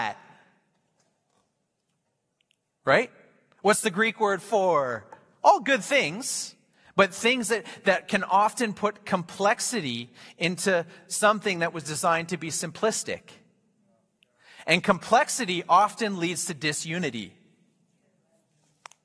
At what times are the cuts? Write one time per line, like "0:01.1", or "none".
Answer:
none